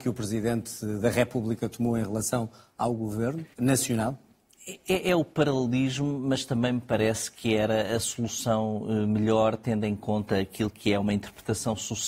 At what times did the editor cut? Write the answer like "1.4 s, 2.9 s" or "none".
3.5 s